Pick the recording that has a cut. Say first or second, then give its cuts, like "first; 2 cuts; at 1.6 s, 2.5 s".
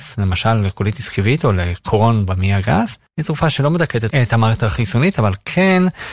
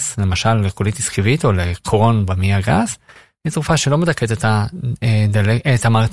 first; 2 cuts; at 3.1 s, 4.1 s